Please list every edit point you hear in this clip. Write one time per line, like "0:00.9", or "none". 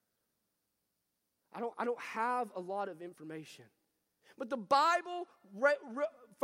0:01.4
0:04.2

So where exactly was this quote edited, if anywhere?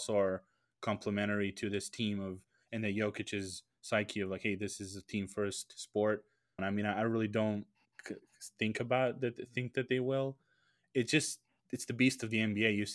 0:06.6

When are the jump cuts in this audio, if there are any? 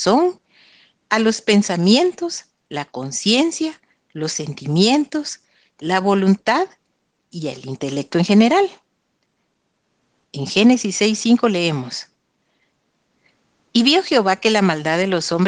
0:10.2

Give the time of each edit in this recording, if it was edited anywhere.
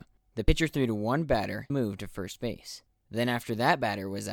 0:01.7

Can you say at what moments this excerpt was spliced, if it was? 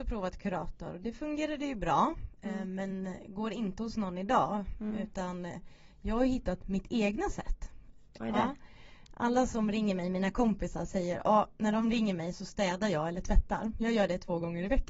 0:08.2

